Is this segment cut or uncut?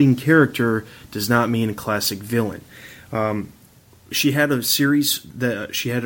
uncut